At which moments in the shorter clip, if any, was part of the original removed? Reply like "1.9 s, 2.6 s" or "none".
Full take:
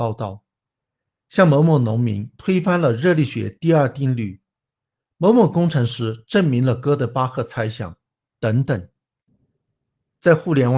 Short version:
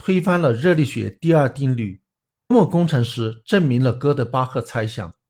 2.5 s